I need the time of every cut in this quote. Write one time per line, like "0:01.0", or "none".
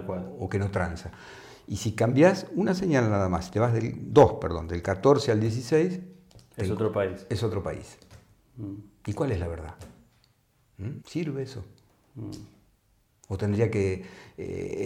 0:11.0